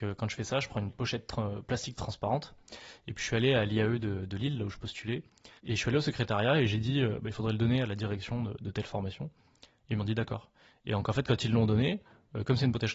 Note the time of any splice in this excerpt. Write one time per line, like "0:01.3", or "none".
0:05.6